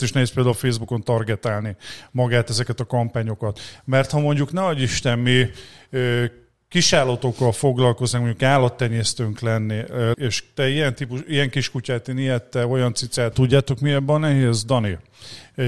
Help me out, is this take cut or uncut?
cut